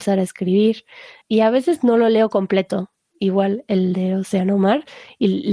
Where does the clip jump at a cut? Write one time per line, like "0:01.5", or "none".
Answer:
0:01.2
0:03.0